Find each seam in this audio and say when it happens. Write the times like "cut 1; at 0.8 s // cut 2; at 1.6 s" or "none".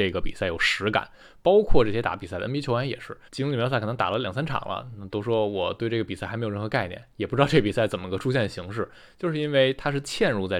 cut 1; at 3.3 s